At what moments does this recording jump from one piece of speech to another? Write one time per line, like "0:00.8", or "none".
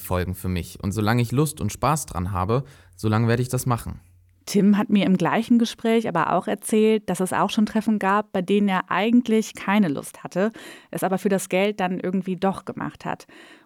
none

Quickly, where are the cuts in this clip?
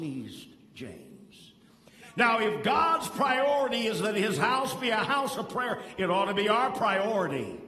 none

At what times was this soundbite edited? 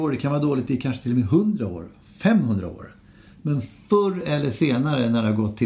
none

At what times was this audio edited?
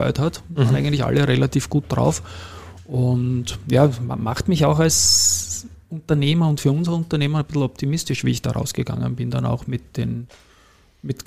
0:05.8

